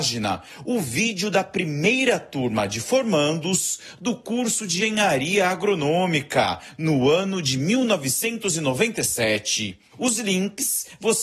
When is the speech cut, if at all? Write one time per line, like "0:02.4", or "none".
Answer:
0:04.8
0:09.9